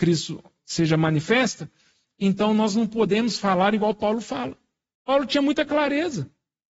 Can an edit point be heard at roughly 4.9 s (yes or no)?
yes